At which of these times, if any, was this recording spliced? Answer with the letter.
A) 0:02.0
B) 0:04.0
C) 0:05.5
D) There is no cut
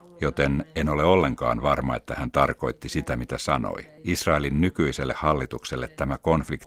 B